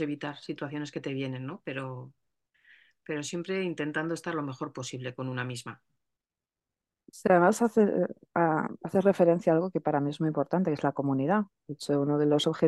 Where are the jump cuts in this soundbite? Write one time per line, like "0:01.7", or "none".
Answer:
none